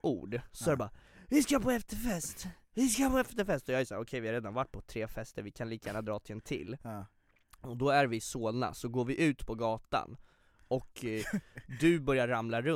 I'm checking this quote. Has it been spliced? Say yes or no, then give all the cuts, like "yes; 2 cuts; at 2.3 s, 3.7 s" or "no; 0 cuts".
no; 0 cuts